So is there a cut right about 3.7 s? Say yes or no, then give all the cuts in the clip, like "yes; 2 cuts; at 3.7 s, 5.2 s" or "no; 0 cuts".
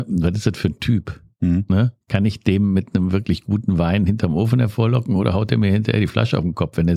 no; 1 cut; at 2.0 s